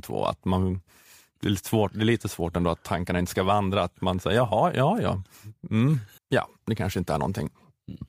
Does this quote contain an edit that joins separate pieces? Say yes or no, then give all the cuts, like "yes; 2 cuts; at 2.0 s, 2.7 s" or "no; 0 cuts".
yes; 1 cut; at 6.2 s